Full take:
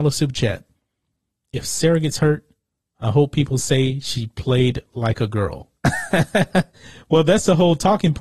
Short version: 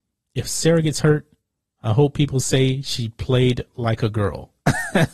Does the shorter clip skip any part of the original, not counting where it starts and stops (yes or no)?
no